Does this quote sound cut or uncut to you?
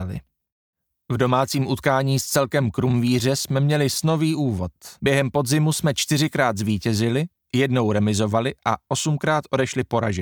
cut